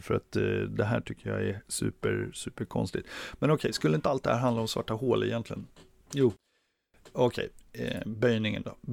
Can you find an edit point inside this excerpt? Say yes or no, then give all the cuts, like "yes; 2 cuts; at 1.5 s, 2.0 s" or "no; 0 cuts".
no; 0 cuts